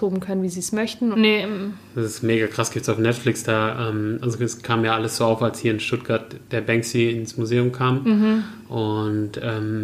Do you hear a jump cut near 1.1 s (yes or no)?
yes